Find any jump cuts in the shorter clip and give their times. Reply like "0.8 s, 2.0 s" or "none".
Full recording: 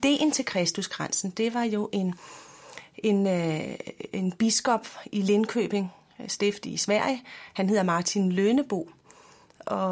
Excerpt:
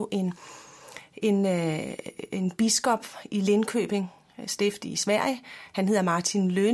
none